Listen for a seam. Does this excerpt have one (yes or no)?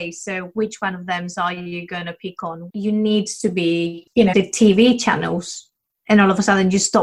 yes